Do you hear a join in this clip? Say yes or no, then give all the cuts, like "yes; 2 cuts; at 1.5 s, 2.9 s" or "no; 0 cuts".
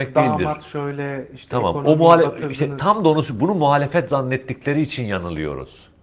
no; 0 cuts